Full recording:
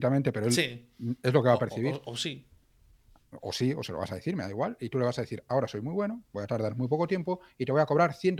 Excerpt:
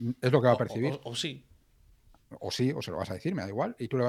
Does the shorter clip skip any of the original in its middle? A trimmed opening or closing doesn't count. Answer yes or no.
no